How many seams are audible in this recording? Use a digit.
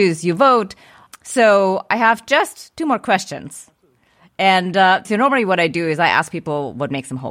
1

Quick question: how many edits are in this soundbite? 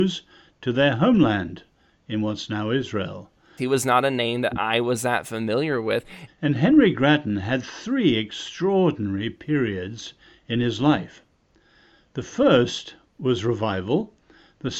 2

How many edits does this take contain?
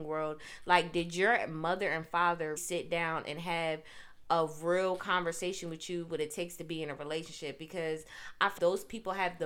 2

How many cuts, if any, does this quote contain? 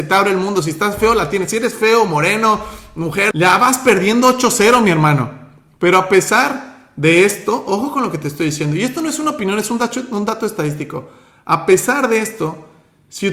1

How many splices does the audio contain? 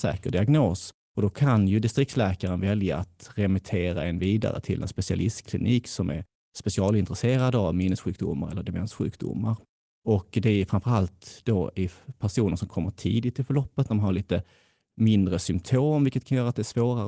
0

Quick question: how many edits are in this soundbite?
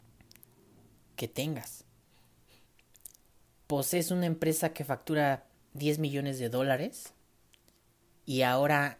0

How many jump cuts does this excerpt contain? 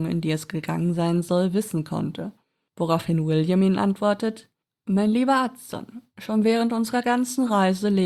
0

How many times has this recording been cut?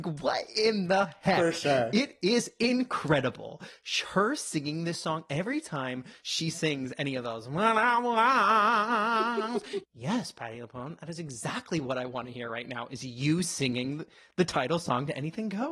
1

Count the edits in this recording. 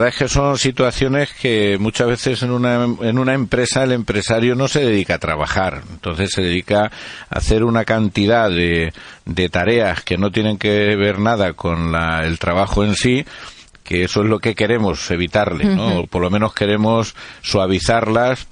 0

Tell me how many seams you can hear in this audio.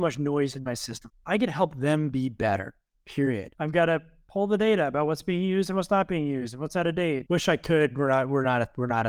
3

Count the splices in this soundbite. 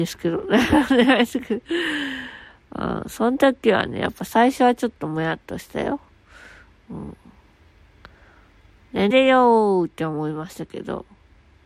1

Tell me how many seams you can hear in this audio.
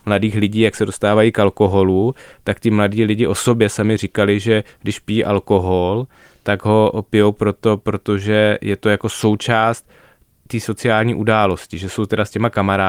0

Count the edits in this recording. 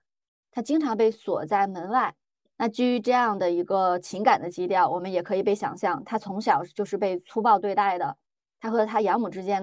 2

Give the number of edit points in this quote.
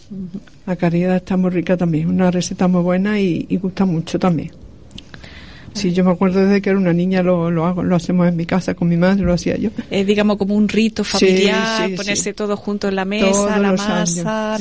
1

